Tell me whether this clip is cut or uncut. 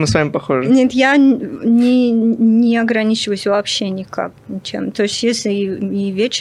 uncut